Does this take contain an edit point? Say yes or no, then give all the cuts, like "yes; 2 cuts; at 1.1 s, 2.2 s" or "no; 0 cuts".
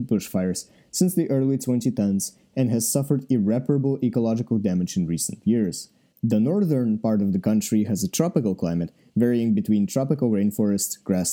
yes; 1 cut; at 6.1 s